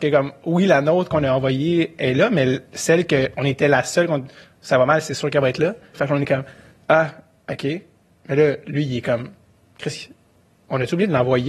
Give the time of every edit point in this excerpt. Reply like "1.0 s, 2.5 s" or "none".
5.9 s

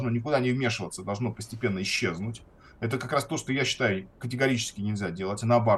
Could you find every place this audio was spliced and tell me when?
none

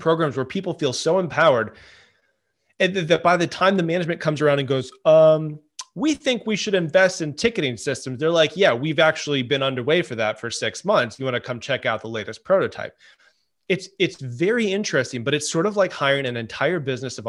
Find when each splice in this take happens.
none

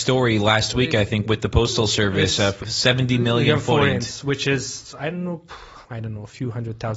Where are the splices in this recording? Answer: 2.6 s, 5.8 s

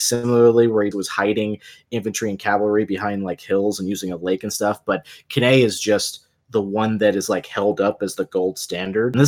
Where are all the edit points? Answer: 0.9 s

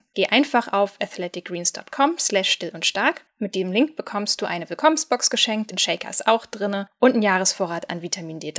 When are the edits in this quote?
5.7 s

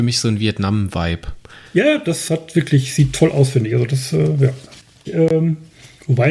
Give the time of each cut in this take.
5.0 s

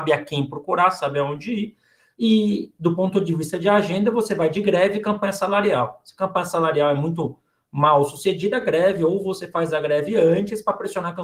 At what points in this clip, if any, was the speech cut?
none

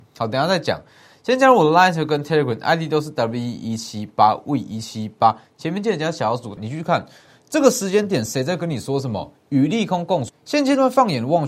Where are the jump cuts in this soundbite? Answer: 6.6 s, 10.3 s

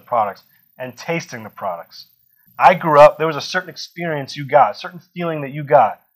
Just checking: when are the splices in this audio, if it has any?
2.5 s

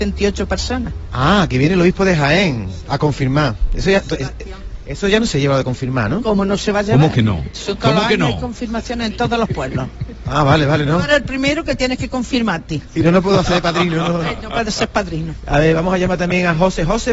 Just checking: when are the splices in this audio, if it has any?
none

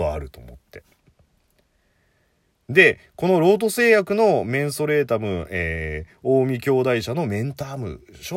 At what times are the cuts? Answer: none

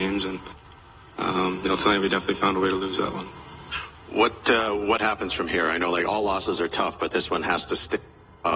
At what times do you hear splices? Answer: none

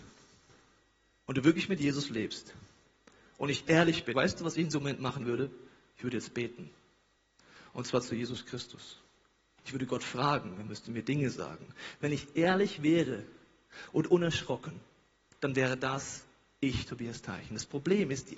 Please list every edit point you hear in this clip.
4.1 s

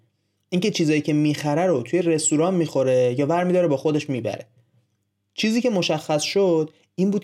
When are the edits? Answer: none

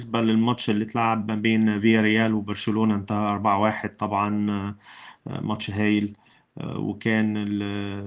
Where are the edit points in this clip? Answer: none

